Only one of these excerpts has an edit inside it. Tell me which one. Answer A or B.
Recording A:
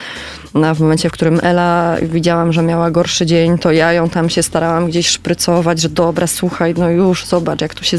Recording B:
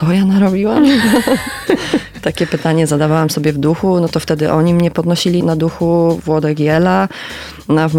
B